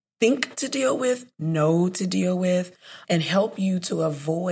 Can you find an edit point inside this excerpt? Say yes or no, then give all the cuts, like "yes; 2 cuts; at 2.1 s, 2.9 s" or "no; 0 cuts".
yes; 1 cut; at 3.0 s